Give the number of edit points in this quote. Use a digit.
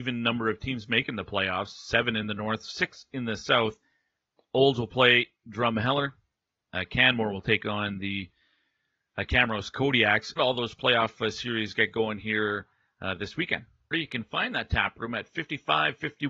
2